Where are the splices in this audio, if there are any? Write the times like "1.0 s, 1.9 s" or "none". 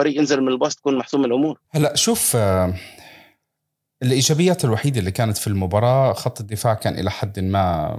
1.6 s